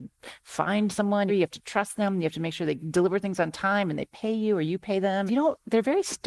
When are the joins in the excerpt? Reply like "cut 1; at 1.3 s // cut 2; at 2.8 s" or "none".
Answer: cut 1; at 1.3 s // cut 2; at 5.3 s